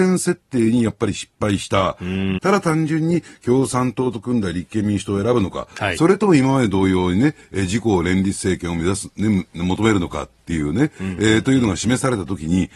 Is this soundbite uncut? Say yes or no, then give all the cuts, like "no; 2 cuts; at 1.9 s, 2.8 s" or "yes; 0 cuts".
no; 1 cut; at 2.4 s